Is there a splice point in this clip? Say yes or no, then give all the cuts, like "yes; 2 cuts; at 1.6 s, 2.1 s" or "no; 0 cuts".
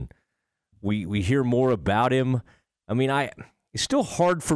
no; 0 cuts